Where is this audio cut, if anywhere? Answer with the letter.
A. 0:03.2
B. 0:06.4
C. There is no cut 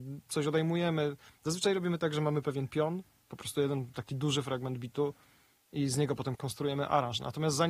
B